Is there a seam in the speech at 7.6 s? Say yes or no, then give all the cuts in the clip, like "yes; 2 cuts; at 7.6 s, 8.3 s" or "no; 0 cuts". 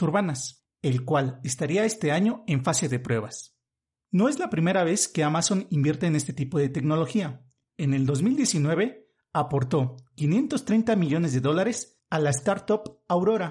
no; 0 cuts